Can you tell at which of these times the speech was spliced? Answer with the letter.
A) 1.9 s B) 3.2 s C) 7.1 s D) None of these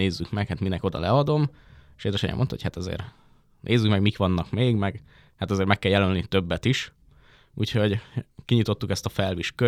D